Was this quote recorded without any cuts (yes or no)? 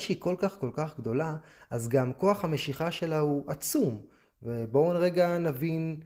yes